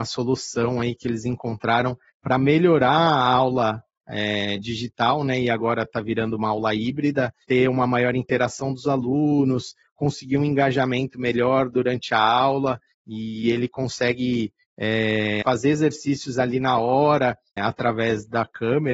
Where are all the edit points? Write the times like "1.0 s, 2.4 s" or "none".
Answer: 7.4 s, 15.4 s, 17.6 s